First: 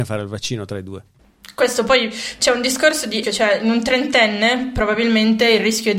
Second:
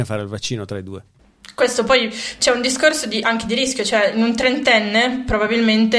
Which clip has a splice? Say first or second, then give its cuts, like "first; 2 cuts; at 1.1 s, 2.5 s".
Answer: first; 1 cut; at 3.2 s